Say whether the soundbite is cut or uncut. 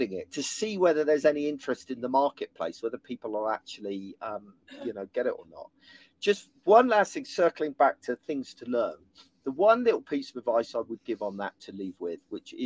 uncut